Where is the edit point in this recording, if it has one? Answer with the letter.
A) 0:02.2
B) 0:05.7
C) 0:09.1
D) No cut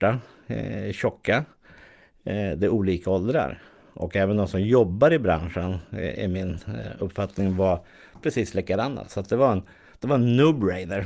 D